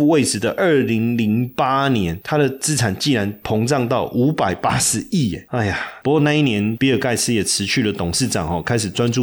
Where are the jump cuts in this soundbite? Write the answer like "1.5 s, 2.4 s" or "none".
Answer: none

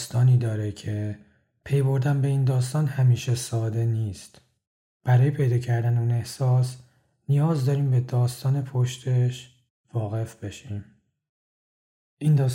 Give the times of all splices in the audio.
4.9 s

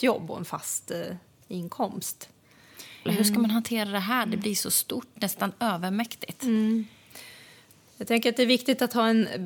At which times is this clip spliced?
3.1 s

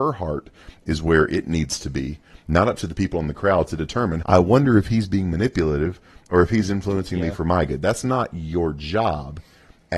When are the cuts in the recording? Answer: 4.2 s

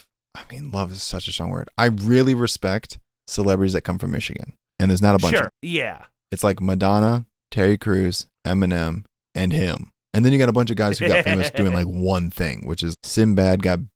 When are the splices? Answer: 5.5 s, 12.9 s

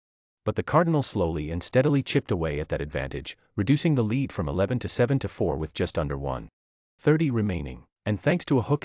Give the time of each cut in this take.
7.9 s

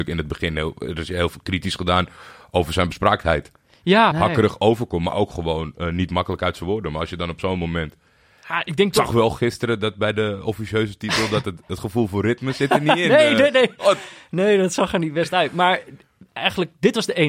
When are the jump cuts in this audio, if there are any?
4.1 s

